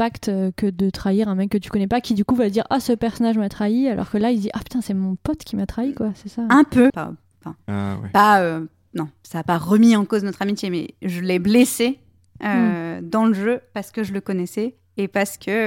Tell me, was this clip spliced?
yes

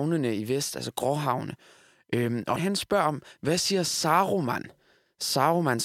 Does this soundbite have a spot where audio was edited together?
yes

